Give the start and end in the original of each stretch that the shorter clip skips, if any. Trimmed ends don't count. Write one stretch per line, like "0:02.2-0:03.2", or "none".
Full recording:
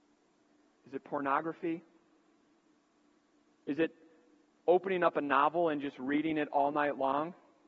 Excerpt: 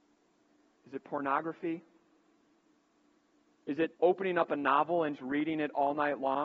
0:04.0-0:04.6
0:05.8-0:05.9